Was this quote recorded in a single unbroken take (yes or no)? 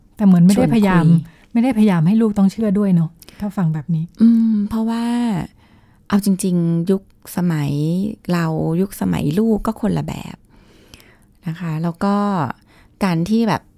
yes